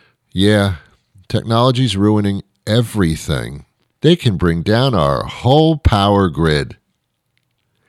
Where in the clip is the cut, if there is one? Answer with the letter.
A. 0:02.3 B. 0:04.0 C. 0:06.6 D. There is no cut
B